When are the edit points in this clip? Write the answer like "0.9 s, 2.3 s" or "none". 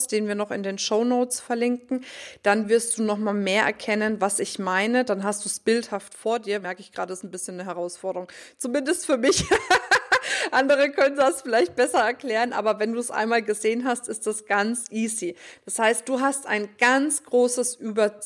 6.6 s